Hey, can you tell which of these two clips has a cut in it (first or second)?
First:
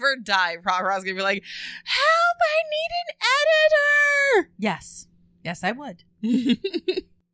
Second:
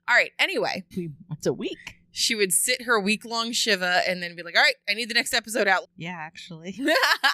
second